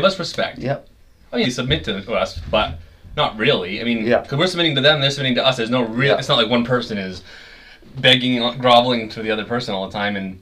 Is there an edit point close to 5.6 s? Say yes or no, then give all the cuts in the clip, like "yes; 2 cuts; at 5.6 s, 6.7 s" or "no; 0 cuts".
no; 1 cut; at 1.4 s